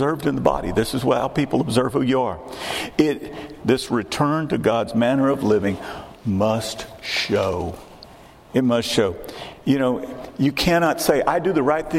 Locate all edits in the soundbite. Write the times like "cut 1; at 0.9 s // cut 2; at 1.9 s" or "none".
cut 1; at 3.6 s